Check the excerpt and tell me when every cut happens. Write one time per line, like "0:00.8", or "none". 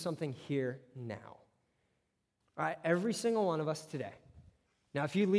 0:02.4

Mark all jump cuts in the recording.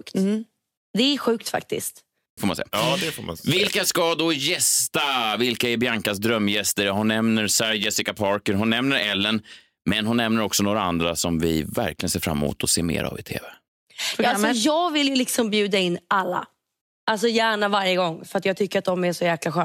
0:02.4

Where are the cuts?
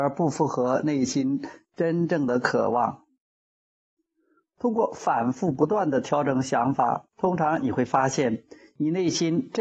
none

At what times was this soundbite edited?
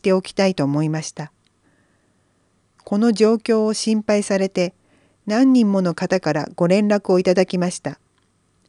none

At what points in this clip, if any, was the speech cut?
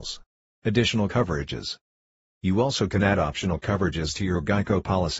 none

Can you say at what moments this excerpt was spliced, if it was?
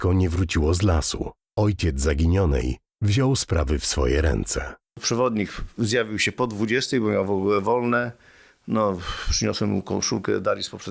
0:04.9

